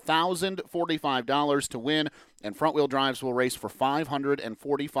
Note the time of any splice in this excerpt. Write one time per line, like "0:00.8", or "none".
none